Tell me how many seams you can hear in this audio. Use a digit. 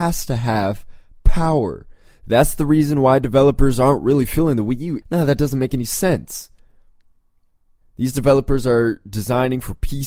2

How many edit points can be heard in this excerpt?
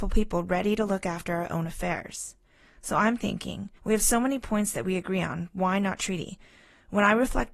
1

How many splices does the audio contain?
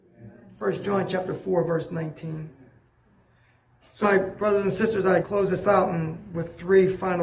2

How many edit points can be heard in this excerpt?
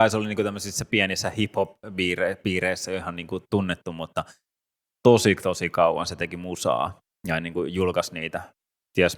0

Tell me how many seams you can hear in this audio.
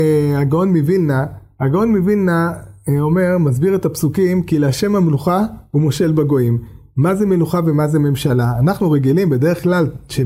0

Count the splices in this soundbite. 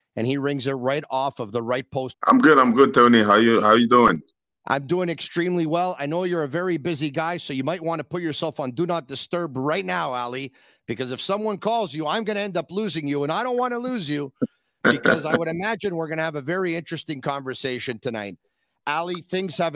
1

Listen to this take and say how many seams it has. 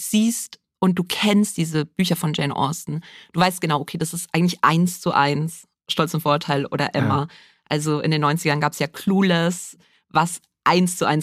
0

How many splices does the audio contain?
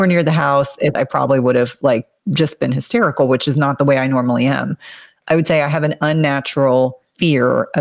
1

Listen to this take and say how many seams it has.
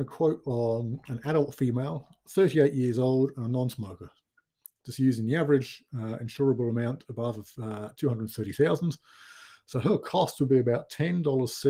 0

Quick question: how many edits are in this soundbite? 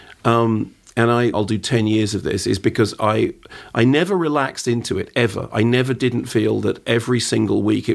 1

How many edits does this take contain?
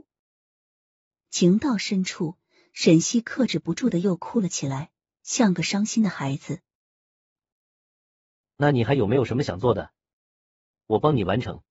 1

